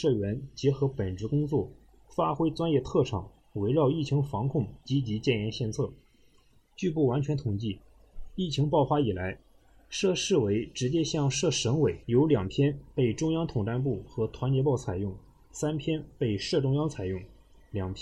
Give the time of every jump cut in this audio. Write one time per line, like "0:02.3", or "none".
0:12.0